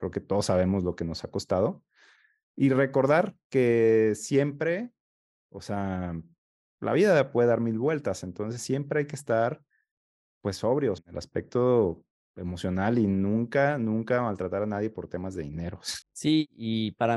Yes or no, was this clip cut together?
yes